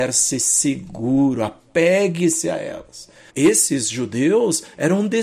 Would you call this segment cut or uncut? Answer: cut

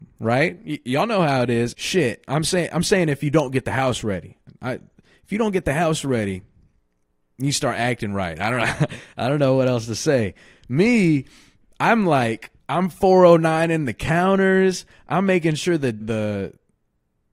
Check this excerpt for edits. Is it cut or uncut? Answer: cut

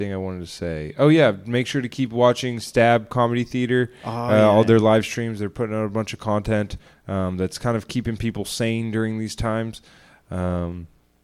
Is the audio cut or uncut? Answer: uncut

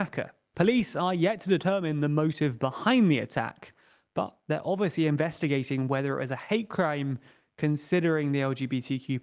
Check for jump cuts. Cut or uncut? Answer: uncut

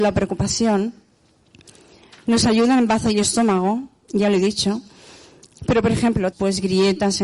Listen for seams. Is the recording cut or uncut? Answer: cut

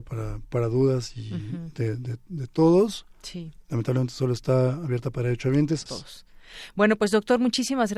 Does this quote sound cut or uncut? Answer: cut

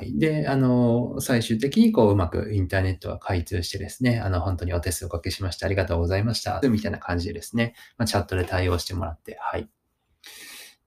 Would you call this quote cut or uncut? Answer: cut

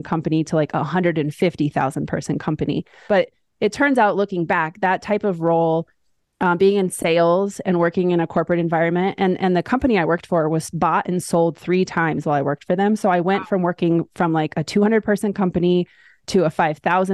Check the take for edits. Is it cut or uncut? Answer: cut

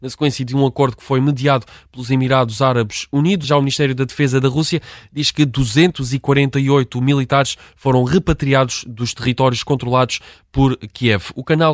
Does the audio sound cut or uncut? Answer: cut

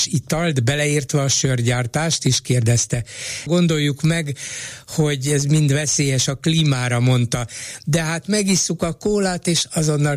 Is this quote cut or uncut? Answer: cut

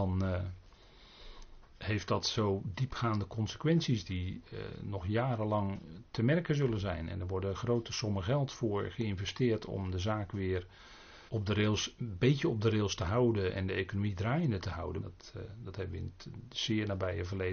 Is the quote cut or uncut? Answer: cut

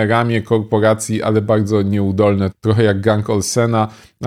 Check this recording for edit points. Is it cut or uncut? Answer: cut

